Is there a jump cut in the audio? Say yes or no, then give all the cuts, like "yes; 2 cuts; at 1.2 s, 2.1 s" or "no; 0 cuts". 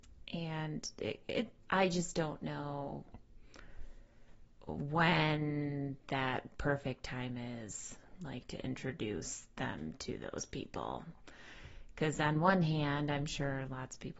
yes; 1 cut; at 1.6 s